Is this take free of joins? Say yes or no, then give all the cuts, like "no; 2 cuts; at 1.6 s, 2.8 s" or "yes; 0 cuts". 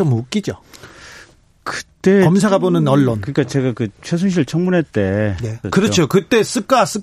no; 1 cut; at 5.6 s